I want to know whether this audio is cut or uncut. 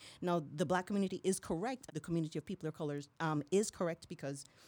cut